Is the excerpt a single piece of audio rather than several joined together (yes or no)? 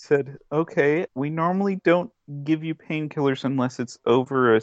no